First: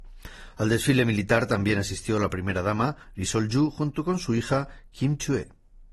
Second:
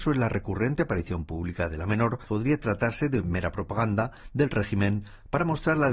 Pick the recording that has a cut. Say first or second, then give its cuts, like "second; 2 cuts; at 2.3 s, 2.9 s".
second; 1 cut; at 2.3 s